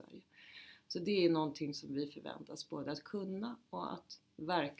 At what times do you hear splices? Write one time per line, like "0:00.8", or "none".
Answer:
none